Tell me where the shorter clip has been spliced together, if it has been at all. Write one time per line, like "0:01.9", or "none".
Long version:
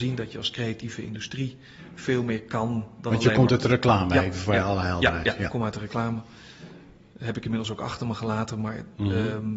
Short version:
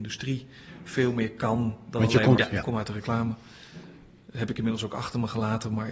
0:02.4